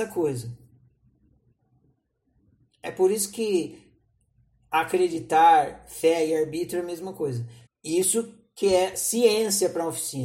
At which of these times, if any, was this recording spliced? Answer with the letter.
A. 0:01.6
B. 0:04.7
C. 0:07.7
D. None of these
C